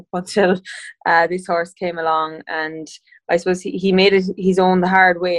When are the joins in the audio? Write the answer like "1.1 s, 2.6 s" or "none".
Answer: none